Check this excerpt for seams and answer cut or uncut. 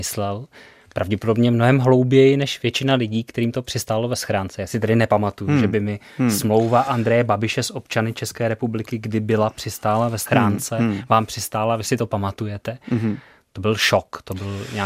uncut